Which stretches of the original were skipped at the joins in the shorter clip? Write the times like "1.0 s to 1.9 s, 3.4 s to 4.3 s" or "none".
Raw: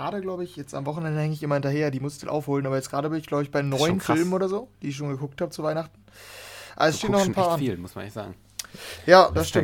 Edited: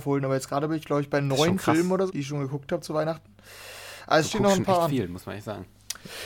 4.5 s to 4.8 s